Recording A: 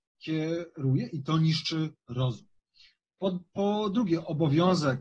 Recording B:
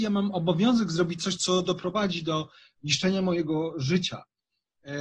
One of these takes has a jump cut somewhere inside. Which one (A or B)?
B